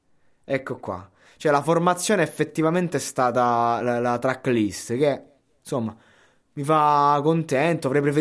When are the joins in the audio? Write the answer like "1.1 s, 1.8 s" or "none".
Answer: none